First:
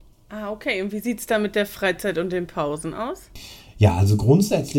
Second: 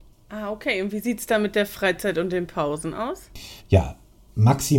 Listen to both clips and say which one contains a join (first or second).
second